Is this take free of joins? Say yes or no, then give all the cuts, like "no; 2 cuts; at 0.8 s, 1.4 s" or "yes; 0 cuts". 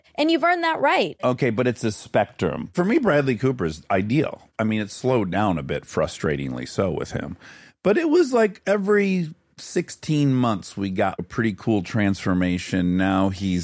yes; 0 cuts